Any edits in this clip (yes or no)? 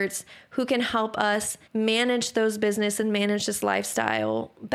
yes